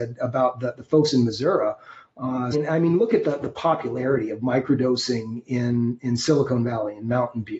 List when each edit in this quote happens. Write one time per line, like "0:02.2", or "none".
0:02.5